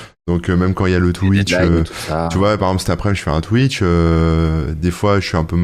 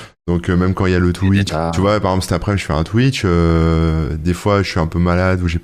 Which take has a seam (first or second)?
second